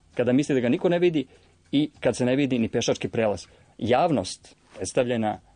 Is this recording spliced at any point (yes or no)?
yes